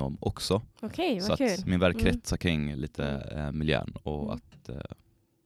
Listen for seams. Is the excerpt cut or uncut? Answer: uncut